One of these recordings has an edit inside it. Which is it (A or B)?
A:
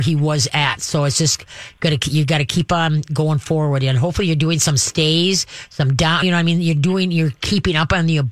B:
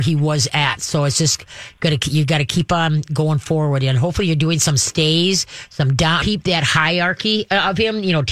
B